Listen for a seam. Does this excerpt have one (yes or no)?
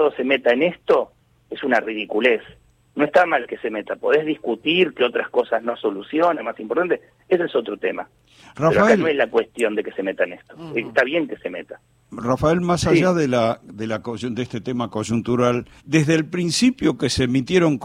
yes